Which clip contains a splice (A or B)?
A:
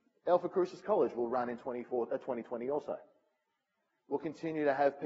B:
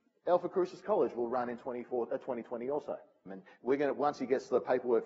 B